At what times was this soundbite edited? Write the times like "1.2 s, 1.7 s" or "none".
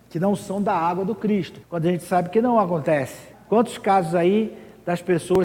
1.6 s, 3.3 s